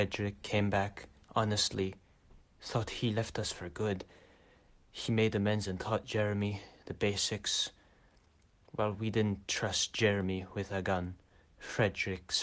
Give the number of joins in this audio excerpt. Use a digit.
1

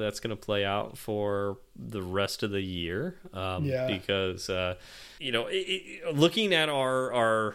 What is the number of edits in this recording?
1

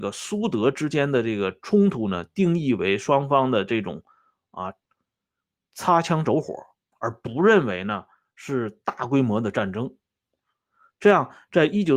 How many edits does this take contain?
0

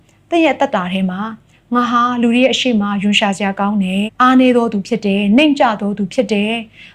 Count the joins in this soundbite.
1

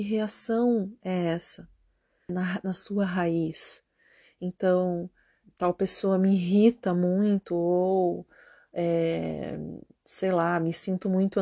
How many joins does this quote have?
2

